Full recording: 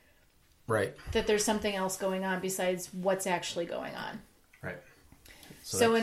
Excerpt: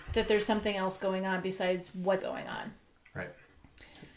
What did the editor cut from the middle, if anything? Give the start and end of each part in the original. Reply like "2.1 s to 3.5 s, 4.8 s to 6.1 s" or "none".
3.2 s to 3.7 s